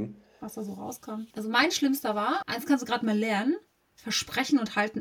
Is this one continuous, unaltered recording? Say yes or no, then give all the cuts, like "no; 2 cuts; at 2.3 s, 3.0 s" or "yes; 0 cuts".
no; 2 cuts; at 1.3 s, 2.4 s